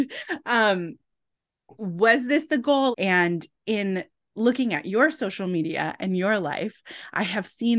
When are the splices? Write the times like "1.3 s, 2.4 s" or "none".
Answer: 2.9 s

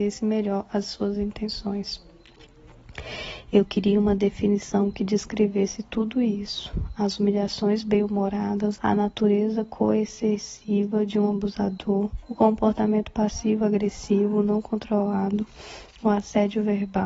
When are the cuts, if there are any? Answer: 8.8 s, 12.2 s

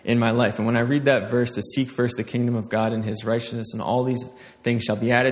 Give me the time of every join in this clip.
none

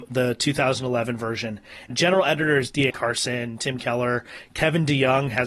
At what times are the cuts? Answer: 1.9 s, 2.9 s

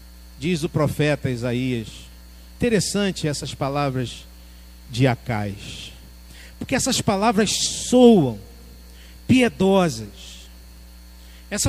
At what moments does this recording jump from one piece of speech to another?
2.5 s, 4.9 s

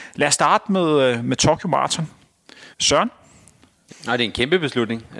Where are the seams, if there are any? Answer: 2.7 s, 3.9 s

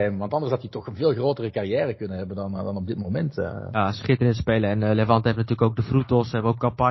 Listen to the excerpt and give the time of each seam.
2.6 s

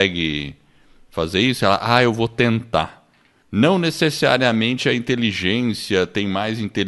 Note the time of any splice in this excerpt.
3.4 s

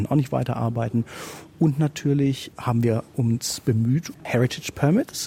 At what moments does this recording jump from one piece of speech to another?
4.1 s

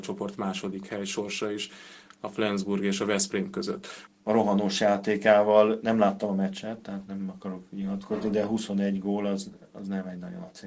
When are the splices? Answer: 4.1 s

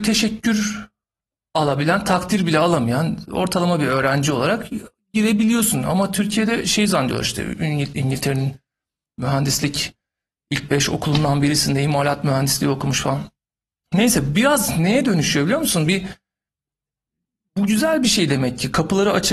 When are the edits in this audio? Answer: none

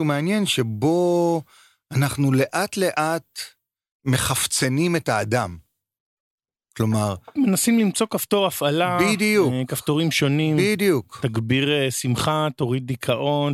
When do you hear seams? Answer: none

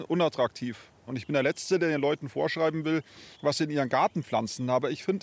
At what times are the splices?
1.1 s

